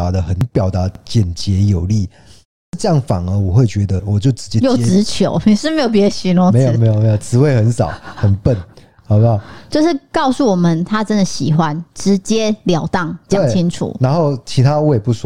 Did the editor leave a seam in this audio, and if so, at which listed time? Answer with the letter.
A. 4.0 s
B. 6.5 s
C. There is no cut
A